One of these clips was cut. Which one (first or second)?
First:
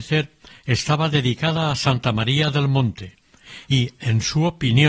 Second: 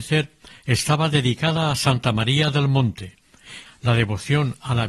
second